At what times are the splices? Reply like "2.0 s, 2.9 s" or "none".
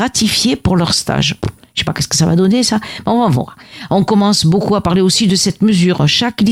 none